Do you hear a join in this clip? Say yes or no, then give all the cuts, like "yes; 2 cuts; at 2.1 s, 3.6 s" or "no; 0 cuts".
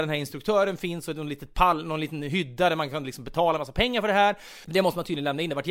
yes; 1 cut; at 4.6 s